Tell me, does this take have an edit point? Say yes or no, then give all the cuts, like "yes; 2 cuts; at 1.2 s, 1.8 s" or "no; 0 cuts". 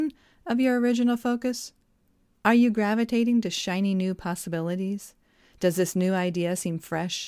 yes; 1 cut; at 2.3 s